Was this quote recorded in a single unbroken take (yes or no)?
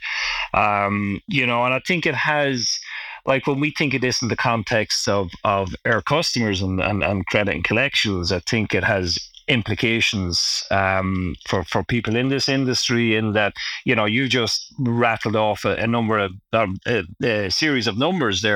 yes